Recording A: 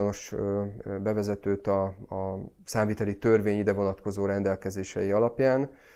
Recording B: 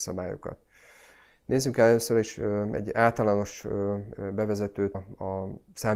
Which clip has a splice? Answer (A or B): B